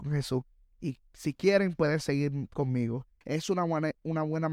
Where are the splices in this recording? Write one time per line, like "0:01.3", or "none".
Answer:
0:03.2